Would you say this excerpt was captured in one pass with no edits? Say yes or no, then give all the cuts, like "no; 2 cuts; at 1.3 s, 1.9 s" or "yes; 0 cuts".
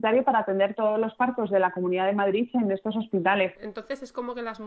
no; 1 cut; at 3.5 s